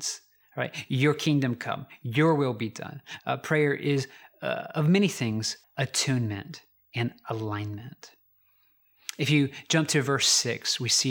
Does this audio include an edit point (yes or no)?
yes